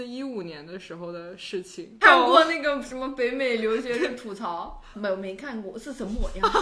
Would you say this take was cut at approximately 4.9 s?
yes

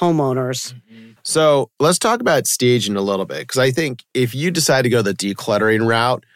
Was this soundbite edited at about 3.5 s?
no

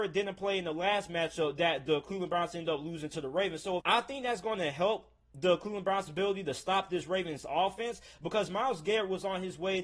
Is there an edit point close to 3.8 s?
yes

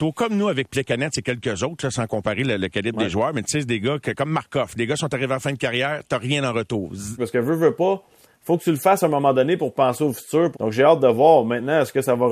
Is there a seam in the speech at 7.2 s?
yes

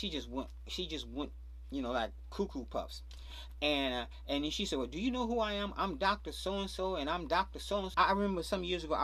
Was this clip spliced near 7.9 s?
yes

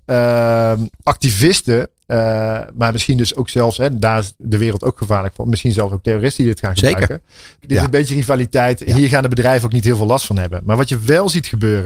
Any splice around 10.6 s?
no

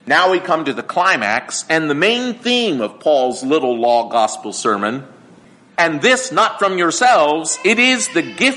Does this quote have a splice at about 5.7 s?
yes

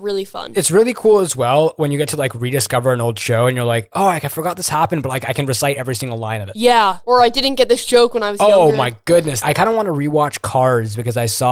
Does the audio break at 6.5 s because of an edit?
no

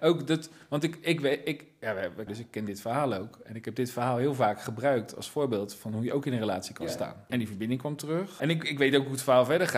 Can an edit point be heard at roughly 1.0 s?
no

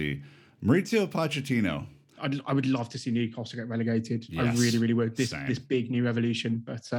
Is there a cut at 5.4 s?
no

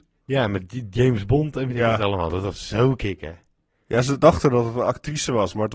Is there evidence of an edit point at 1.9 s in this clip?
no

